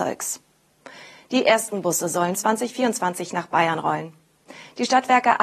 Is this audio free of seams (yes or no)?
no